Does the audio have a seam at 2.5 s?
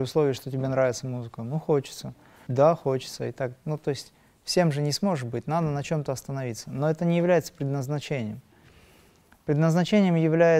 yes; 1 cut; at 2.5 s

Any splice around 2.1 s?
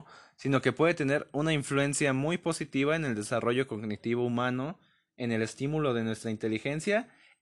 no; 0 cuts

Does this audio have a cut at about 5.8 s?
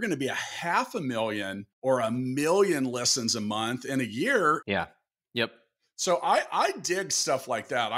no; 2 cuts; at 1.7 s, 4.6 s

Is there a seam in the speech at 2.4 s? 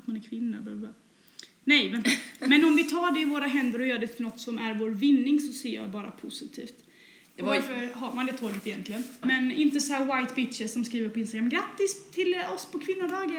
no; 2 cuts; at 7.2 s, 9.2 s

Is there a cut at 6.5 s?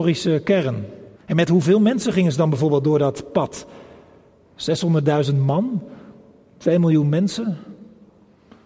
no; 1 cut; at 1.1 s

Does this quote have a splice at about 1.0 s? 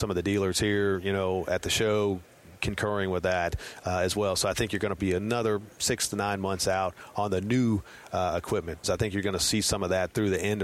no; 2 cuts; at 5.0 s, 8.8 s

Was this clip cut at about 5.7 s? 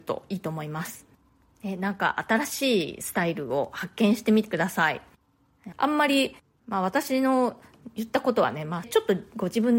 yes; 2 cuts; at 5.7 s, 8.8 s

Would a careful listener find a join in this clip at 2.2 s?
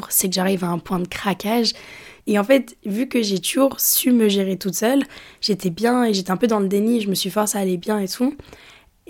yes; 1 cut; at 2.2 s

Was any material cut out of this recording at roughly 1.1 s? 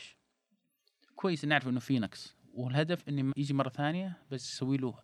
no; 1 cut; at 3.3 s

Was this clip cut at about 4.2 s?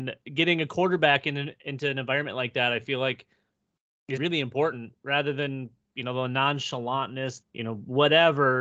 yes; 2 cuts; at 4.2 s, 7.4 s

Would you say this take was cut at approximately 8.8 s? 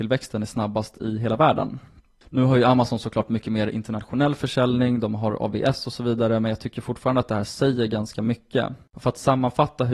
yes; 1 cut; at 8.8 s

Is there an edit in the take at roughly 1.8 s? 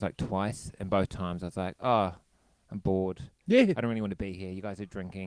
no; 0 cuts

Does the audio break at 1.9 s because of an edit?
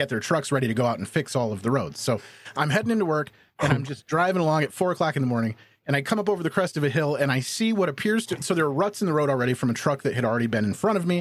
no; 0 cuts

